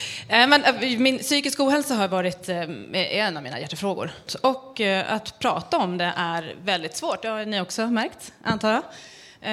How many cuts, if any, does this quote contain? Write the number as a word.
one